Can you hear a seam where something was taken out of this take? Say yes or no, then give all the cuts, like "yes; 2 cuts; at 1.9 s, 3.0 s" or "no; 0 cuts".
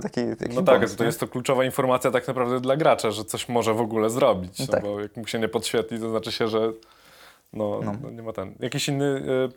no; 0 cuts